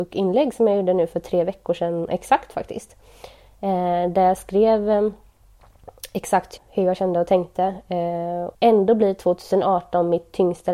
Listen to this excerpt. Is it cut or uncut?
cut